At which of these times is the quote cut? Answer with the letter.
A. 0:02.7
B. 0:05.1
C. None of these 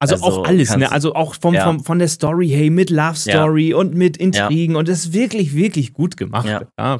C